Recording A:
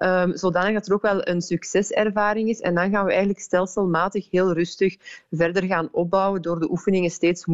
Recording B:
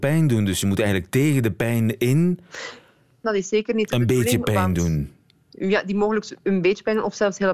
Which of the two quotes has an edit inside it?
B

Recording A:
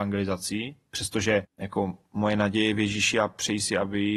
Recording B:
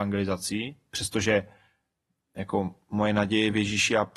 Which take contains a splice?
A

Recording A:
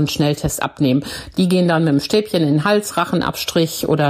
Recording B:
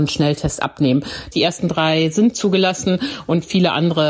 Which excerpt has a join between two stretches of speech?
B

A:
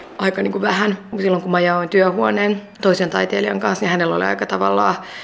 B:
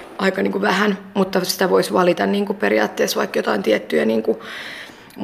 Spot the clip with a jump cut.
A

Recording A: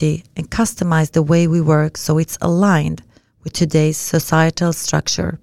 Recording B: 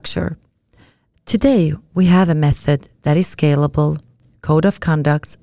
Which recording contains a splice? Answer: B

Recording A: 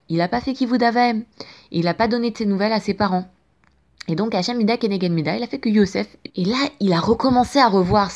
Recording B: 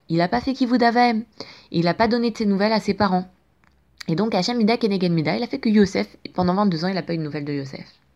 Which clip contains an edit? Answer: A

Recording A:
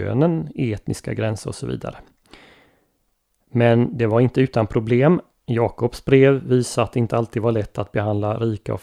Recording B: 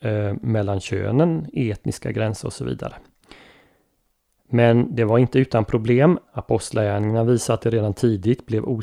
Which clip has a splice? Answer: B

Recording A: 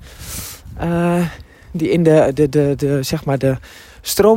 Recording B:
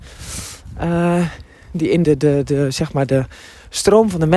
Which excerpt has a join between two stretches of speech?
B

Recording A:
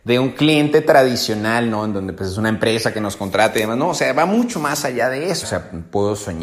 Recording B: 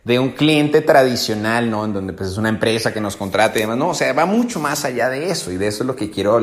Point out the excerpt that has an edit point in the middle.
A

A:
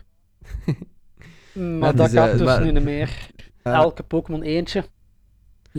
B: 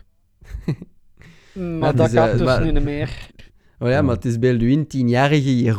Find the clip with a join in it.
A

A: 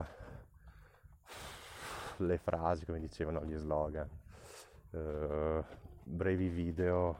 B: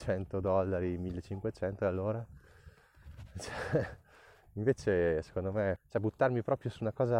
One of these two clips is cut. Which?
B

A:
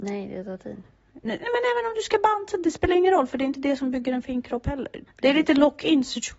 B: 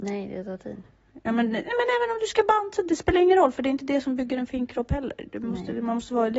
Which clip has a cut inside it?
A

